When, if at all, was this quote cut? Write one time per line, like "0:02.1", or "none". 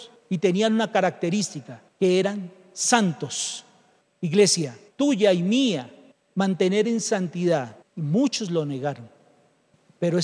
0:04.9
0:07.8